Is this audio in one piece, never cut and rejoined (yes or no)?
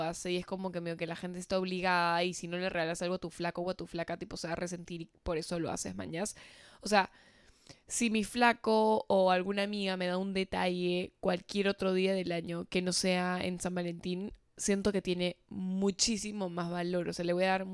yes